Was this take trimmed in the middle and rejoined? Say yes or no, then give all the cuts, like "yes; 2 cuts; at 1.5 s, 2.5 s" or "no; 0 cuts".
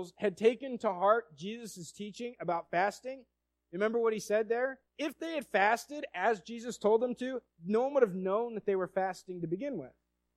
yes; 1 cut; at 4.9 s